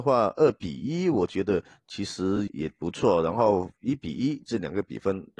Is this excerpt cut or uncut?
cut